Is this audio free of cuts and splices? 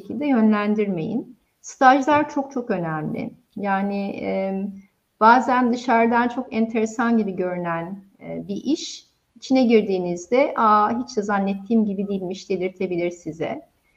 yes; 0 cuts

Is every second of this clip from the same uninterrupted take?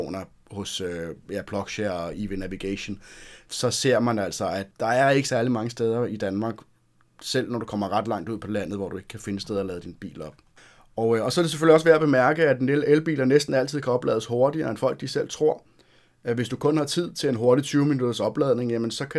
yes; 0 cuts

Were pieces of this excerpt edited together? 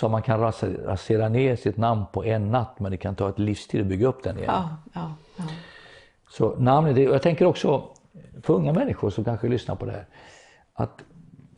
no; 0 cuts

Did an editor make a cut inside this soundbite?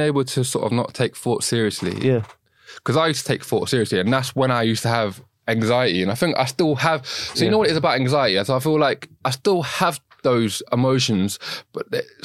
yes; 1 cut; at 3.7 s

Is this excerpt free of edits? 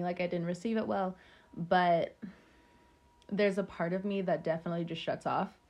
yes; 0 cuts

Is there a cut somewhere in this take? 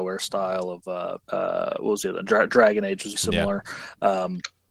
yes; 2 cuts; at 1.2 s, 3.2 s

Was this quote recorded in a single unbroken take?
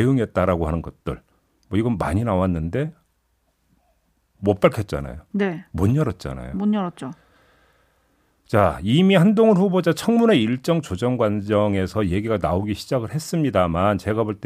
yes; 0 cuts

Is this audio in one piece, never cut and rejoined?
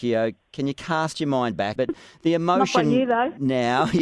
no; 1 cut; at 1.8 s

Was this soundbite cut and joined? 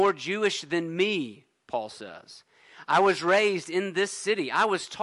no; 0 cuts

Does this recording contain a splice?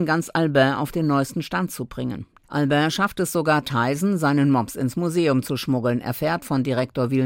yes; 1 cut; at 2.4 s

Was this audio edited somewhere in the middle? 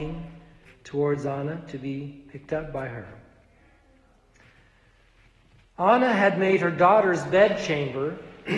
no; 0 cuts

